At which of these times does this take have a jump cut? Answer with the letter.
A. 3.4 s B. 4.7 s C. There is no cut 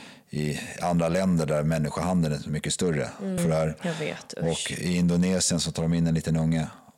A